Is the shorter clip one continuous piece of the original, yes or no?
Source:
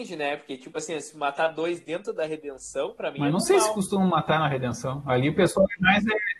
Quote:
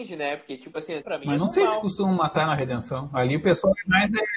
no